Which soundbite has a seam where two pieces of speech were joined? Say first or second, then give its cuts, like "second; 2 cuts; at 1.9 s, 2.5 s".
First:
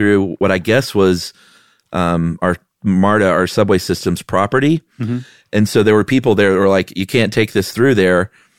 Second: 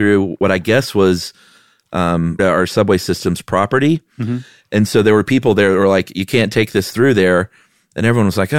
second; 1 cut; at 2.4 s